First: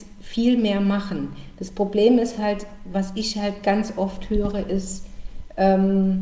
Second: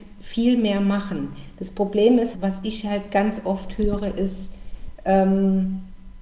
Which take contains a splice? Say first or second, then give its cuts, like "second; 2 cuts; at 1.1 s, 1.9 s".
second; 1 cut; at 2.3 s